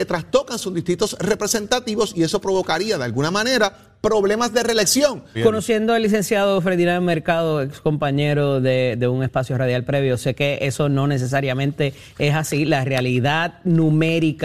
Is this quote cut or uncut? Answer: cut